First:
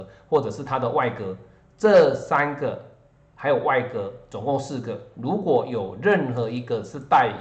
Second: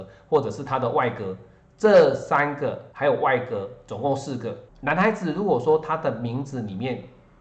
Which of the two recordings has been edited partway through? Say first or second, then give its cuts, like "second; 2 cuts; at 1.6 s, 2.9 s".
second; 2 cuts; at 2.9 s, 4.7 s